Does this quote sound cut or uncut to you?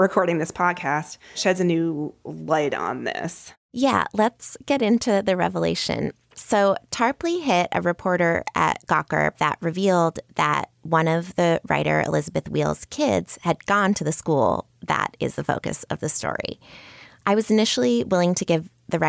cut